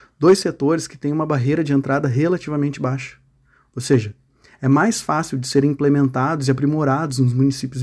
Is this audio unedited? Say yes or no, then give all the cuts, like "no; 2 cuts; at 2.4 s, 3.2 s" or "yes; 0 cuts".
yes; 0 cuts